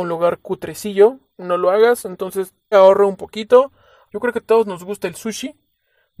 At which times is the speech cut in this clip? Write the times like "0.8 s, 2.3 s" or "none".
2.7 s, 4.1 s